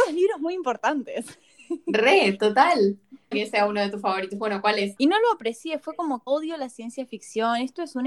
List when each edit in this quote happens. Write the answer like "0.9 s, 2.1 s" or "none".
3.3 s, 5.0 s, 6.3 s